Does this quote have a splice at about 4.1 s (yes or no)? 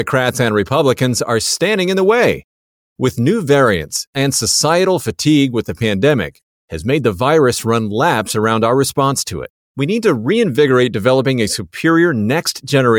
yes